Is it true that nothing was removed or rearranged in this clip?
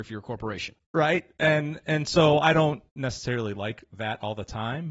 yes; 0 cuts

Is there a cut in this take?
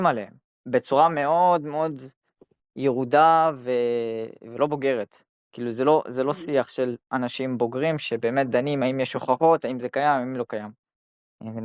no; 0 cuts

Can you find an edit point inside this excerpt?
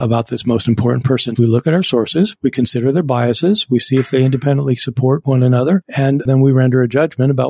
yes; 1 cut; at 1.4 s

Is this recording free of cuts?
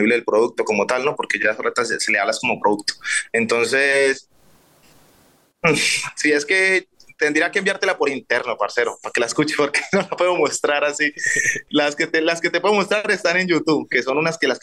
yes; 0 cuts

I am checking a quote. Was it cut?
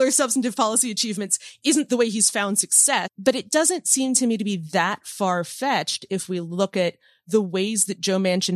yes; 1 cut; at 3.1 s

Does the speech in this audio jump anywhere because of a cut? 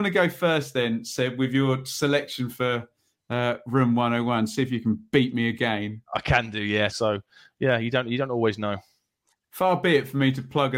yes; 1 cut; at 6.9 s

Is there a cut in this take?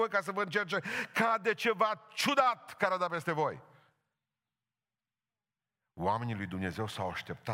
no; 0 cuts

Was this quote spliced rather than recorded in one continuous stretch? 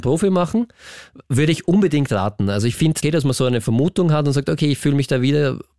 yes; 1 cut; at 3.0 s

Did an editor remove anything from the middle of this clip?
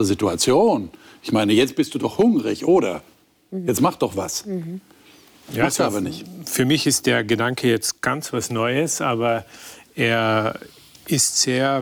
no; 0 cuts

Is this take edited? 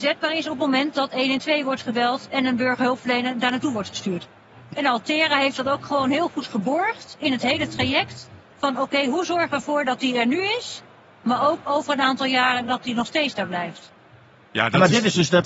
yes; 1 cut; at 4.7 s

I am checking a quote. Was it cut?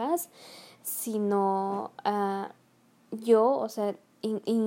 no; 0 cuts

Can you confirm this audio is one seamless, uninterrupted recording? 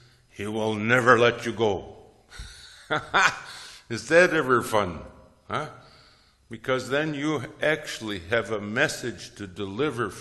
yes; 0 cuts

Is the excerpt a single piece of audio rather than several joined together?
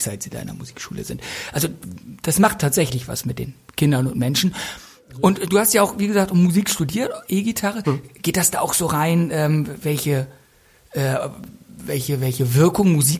yes; 0 cuts

